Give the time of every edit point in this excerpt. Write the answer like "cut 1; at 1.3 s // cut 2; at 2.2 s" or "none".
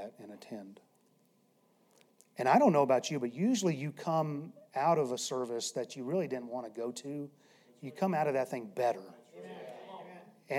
none

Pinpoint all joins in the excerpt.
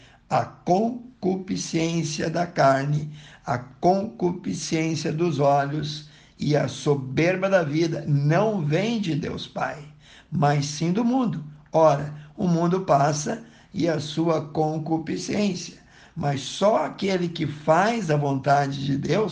none

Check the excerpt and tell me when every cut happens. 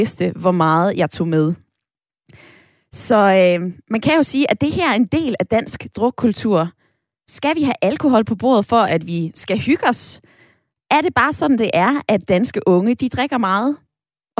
none

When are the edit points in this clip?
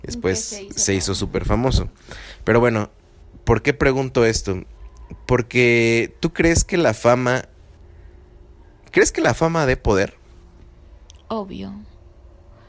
none

